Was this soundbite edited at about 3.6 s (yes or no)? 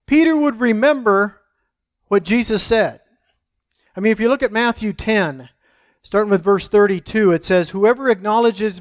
no